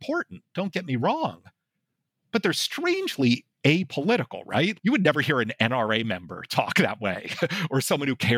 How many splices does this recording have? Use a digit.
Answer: 1